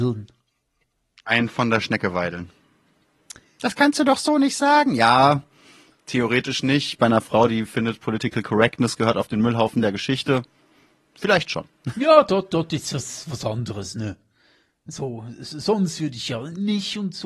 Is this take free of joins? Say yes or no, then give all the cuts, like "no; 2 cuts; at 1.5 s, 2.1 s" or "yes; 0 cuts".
yes; 0 cuts